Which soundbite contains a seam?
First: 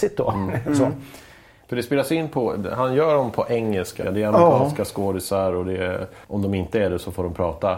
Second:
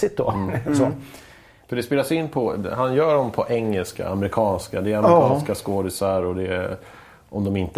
first; 2 cuts; at 4.0 s, 6.2 s

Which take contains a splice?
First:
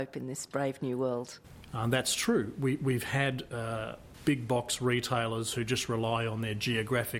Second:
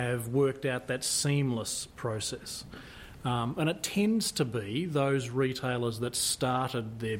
first; 1 cut; at 1.7 s

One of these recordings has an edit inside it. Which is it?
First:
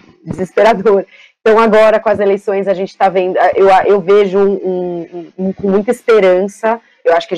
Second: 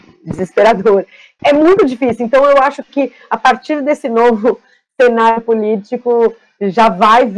second; 1 cut; at 1.4 s

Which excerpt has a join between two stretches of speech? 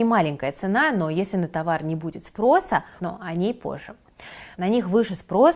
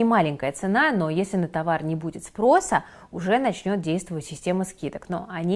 first; 2 cuts; at 3.0 s, 4.5 s

